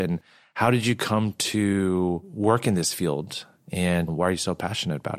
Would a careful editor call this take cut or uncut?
cut